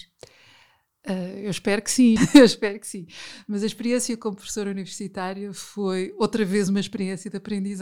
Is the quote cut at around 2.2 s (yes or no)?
yes